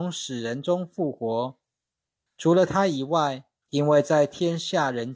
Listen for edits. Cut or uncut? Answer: cut